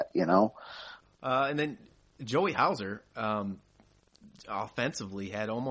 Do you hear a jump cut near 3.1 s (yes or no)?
no